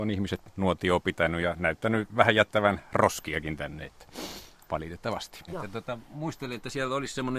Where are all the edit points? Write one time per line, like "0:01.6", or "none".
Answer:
0:05.5